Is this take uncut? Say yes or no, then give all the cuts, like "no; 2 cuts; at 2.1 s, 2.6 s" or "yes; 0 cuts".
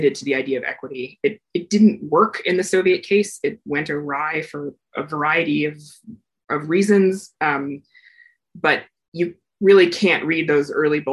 yes; 0 cuts